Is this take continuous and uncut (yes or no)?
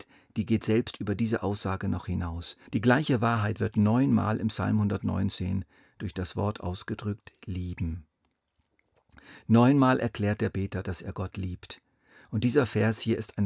no